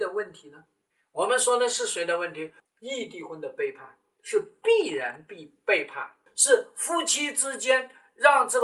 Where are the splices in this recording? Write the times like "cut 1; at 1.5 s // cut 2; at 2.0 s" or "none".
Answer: cut 1; at 2.6 s // cut 2; at 6.3 s